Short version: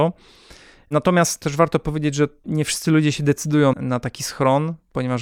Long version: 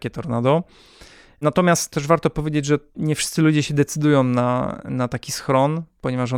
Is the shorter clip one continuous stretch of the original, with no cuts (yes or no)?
no